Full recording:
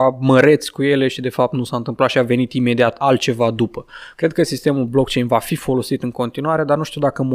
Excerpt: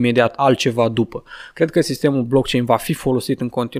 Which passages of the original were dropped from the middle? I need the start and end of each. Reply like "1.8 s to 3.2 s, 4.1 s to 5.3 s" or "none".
none